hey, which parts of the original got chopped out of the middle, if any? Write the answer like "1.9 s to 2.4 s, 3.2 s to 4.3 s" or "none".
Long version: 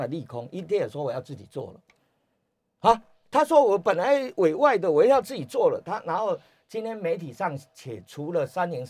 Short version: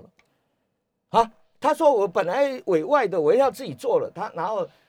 none